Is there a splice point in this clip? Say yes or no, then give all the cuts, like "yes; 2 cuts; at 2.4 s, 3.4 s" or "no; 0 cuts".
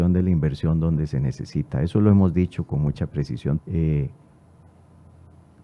yes; 1 cut; at 3.6 s